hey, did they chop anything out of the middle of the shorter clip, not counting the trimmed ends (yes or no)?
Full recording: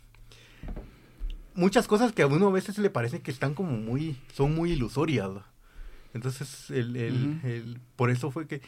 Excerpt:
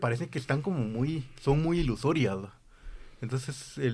no